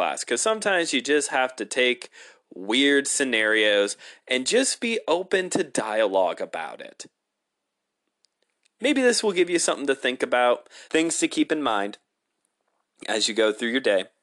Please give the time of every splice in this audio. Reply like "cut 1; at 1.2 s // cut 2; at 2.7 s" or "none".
cut 1; at 10.9 s